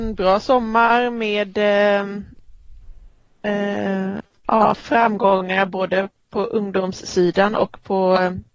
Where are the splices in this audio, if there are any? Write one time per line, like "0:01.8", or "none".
none